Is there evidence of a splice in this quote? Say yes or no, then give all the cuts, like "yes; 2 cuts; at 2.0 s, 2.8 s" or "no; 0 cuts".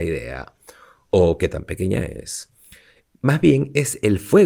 no; 0 cuts